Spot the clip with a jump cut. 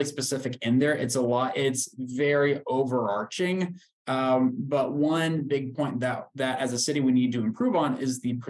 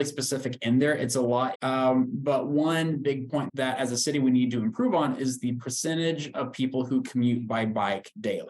second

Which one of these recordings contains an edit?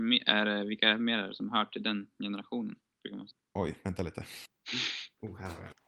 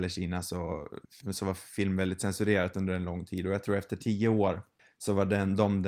second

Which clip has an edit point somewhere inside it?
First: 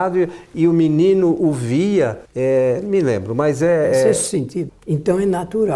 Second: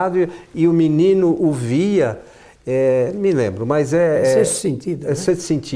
first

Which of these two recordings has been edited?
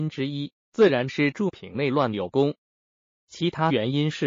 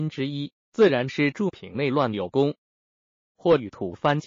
second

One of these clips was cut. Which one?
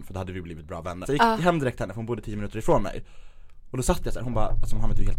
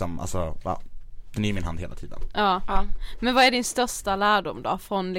first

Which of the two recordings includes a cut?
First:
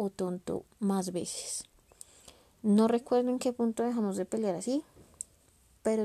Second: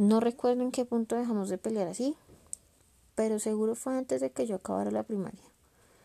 first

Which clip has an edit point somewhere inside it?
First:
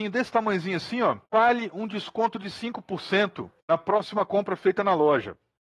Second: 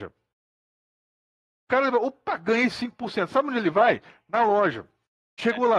first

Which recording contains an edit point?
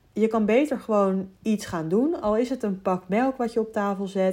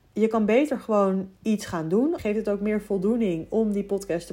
second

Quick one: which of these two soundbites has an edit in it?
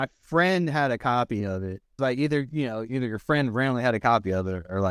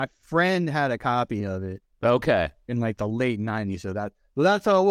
first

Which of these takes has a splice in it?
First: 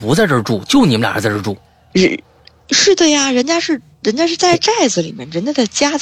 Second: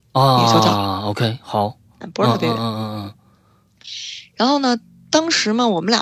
second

